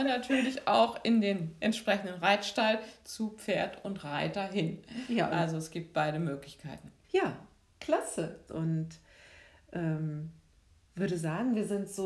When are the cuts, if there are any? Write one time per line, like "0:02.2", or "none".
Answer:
0:07.0
0:08.5